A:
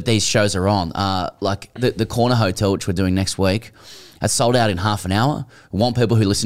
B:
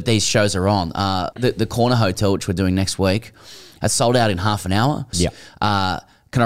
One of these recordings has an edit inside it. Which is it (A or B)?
B